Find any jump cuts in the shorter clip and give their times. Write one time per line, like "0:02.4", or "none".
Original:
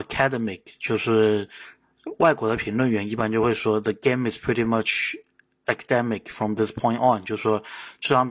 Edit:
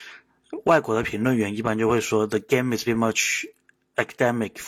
0:02.9